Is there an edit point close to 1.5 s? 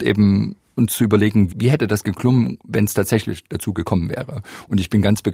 yes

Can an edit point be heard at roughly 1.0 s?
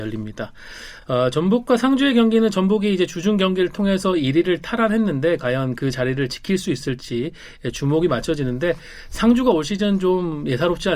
no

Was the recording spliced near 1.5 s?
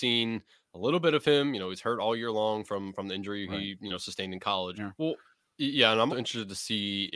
no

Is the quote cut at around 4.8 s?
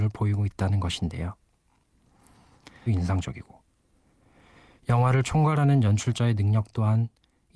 no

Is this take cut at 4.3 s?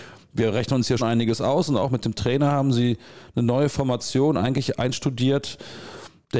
no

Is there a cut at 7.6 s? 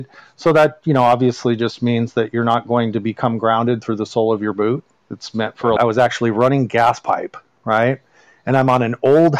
yes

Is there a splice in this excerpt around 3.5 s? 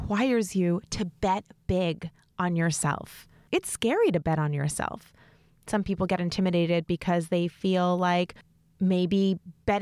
yes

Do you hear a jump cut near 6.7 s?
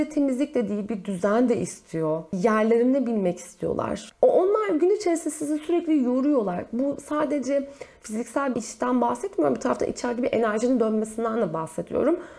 no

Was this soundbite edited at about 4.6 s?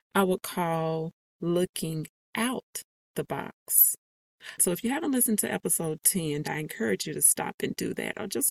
yes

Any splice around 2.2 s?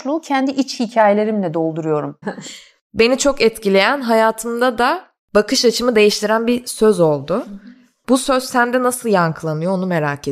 yes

